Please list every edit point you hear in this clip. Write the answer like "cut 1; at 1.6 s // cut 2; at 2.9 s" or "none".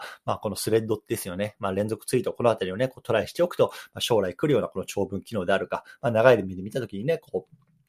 none